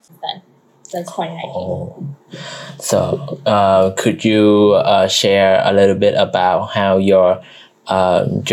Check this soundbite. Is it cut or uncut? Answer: uncut